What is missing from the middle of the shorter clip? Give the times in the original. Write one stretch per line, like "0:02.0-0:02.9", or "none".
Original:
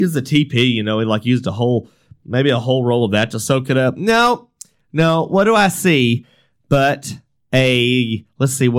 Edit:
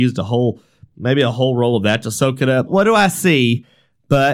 0:03.9-0:05.3

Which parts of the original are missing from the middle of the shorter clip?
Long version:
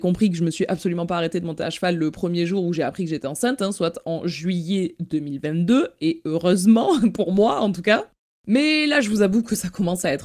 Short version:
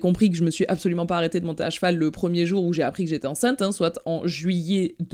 none

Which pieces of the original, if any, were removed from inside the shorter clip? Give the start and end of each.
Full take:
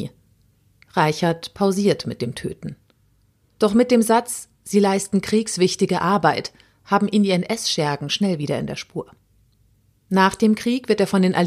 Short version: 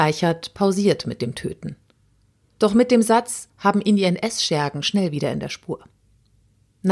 0:04.5-0:06.8

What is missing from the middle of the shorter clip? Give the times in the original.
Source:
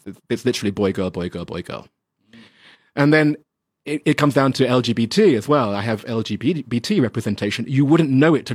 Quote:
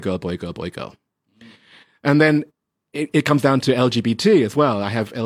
none

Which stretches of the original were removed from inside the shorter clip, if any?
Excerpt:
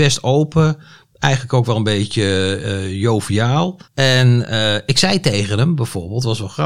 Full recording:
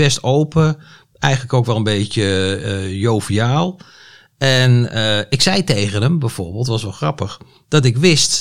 0:03.8-0:04.3

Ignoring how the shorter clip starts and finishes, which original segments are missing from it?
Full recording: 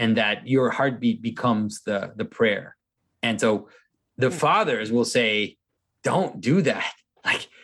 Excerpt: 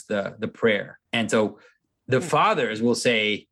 0:02.8-0:03.2

